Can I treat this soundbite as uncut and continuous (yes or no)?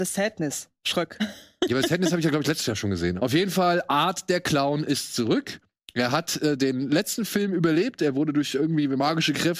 no